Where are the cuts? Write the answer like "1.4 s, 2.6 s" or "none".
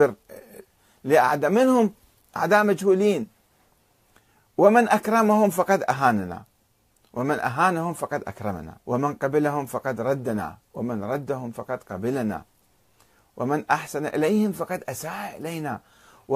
8.8 s

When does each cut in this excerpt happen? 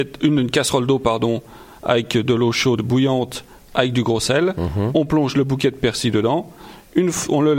2.8 s

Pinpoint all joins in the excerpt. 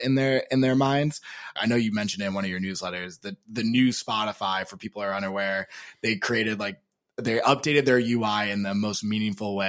1.6 s

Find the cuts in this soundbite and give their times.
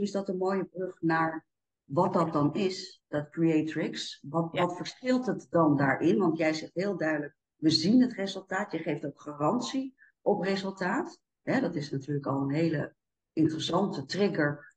none

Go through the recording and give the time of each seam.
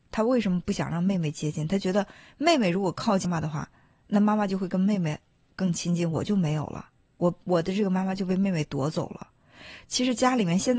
3.2 s

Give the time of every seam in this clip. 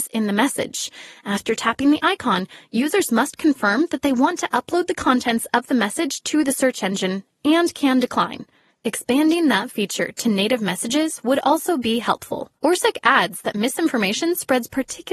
8.7 s, 12.6 s

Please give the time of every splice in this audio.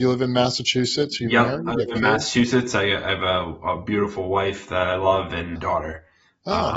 5.6 s

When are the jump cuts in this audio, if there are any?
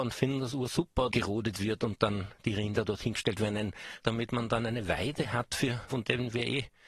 1.1 s, 4.0 s, 5.9 s

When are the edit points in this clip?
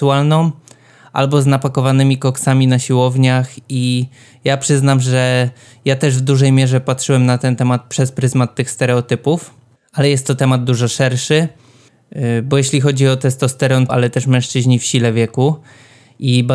13.9 s

